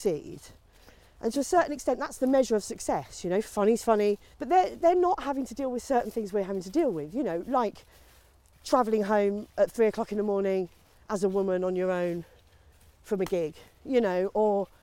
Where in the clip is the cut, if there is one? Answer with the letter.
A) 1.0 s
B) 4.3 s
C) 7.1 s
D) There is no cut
B